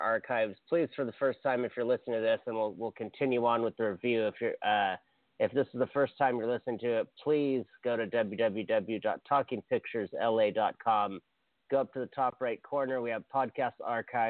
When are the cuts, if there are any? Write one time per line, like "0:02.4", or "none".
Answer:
none